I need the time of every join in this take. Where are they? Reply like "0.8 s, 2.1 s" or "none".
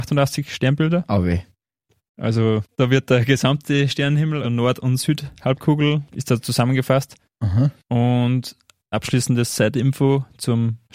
4.4 s